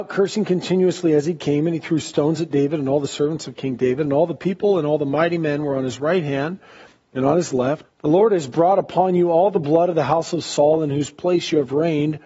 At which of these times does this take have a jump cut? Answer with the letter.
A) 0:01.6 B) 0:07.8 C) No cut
B